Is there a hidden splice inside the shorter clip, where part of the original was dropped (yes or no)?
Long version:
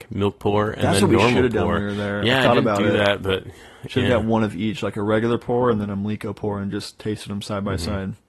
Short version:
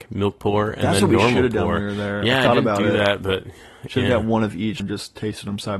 yes